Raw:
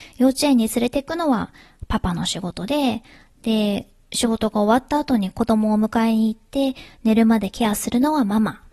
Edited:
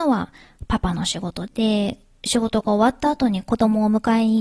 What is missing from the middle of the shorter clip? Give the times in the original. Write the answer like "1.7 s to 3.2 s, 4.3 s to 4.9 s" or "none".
2.7 s to 3.3 s